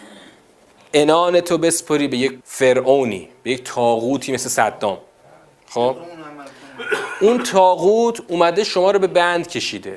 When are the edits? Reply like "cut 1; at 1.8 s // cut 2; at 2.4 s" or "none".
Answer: cut 1; at 2.4 s